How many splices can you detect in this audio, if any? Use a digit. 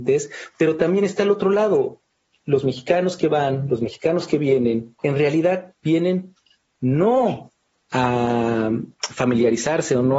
1